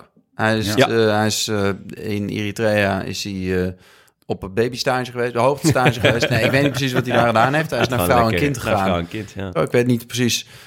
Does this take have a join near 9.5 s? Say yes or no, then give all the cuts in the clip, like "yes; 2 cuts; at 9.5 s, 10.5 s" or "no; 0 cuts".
yes; 1 cut; at 9.5 s